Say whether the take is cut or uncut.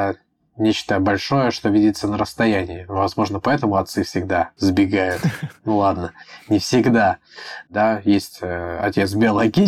cut